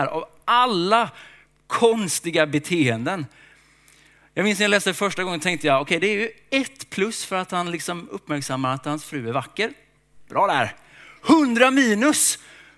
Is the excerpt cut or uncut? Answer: uncut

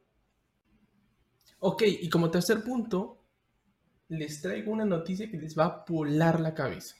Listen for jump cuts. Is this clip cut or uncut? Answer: uncut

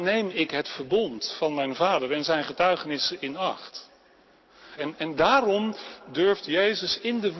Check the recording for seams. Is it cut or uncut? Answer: cut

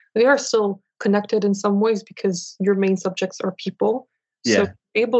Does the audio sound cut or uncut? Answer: uncut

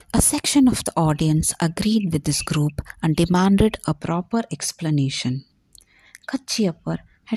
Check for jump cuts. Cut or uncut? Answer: uncut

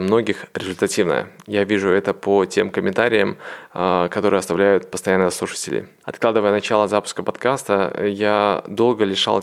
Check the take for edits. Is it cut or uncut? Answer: cut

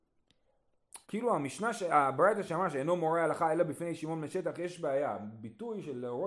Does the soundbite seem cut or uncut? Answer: cut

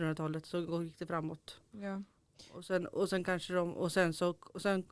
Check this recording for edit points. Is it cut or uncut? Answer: uncut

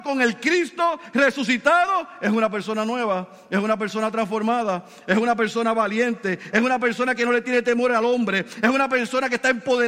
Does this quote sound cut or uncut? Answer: cut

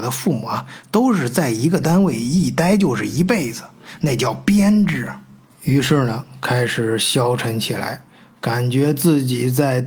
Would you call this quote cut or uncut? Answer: uncut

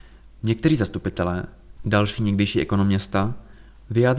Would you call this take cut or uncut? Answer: cut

